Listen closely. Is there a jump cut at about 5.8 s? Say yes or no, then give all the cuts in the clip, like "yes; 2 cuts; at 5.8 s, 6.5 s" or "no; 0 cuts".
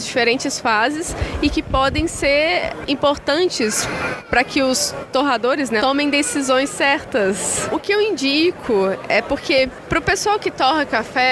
yes; 1 cut; at 5.8 s